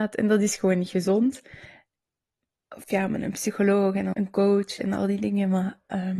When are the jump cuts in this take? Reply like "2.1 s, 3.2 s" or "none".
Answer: 2.7 s, 4.1 s